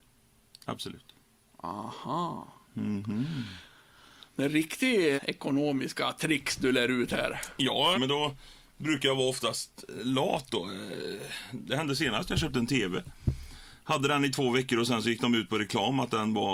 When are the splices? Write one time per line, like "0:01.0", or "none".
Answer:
0:05.2
0:07.9